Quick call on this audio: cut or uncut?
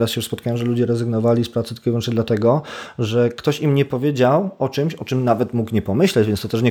uncut